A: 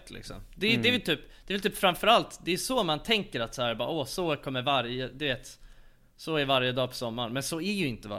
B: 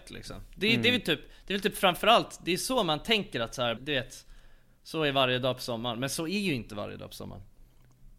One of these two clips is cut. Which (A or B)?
B